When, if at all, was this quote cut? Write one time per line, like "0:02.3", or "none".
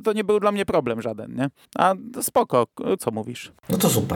0:03.0